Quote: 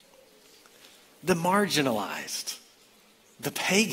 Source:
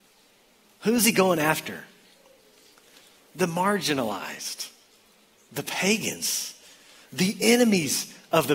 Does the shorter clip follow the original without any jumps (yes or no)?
yes